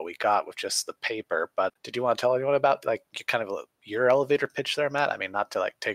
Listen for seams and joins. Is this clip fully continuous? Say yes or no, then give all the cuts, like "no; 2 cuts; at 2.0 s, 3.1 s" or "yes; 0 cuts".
no; 1 cut; at 1.7 s